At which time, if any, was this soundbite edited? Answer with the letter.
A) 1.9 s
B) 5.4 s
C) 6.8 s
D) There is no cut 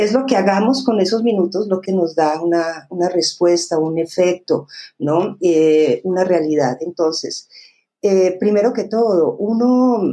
A